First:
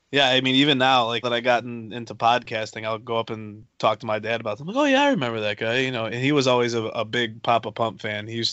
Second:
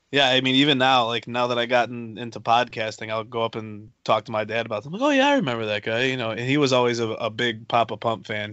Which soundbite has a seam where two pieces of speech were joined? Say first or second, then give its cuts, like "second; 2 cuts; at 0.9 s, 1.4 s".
first; 1 cut; at 1.2 s